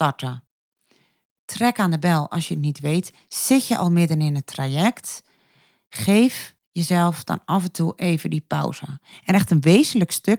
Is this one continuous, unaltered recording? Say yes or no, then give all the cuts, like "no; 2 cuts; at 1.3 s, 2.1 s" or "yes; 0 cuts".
no; 1 cut; at 9.1 s